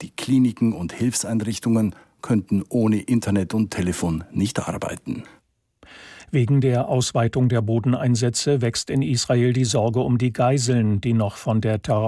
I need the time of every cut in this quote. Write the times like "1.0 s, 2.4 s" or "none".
none

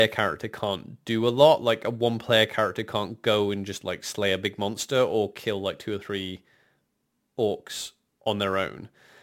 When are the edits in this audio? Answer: none

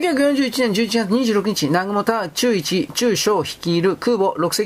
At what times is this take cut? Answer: none

